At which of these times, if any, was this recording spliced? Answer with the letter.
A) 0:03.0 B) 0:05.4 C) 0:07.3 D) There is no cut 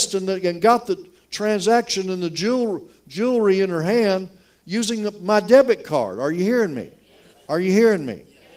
C